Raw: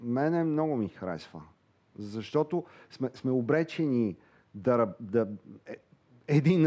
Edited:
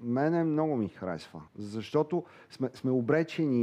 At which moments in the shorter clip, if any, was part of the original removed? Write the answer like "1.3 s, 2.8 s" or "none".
1.5 s